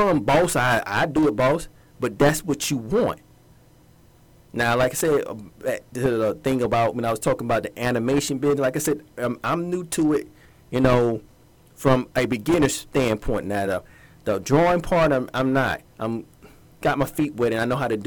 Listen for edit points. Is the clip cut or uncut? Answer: uncut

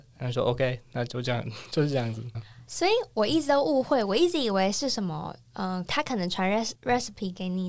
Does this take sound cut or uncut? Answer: cut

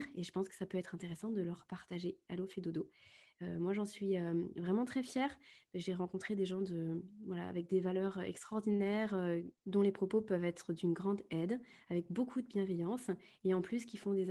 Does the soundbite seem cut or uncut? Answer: uncut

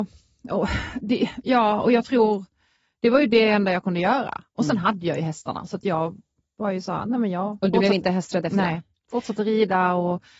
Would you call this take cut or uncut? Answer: uncut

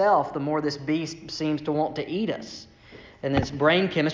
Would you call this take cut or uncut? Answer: uncut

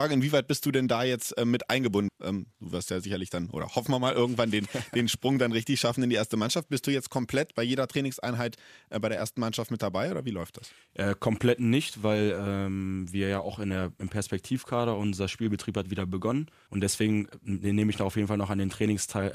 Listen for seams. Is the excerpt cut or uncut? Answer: cut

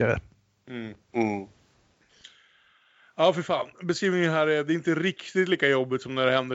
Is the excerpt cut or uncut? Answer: uncut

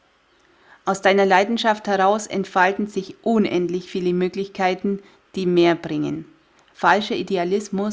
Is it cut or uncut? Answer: uncut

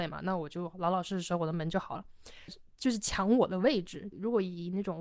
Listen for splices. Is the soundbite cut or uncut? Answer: cut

